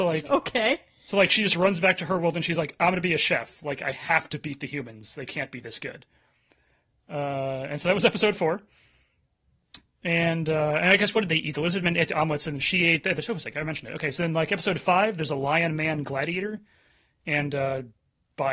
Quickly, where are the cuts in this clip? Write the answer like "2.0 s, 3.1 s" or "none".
none